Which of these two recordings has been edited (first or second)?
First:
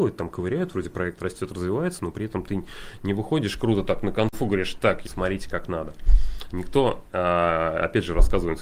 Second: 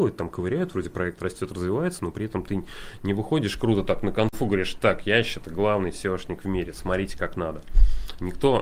first